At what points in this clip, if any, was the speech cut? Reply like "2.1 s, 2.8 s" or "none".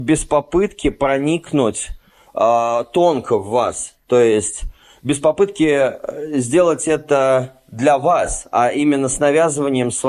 none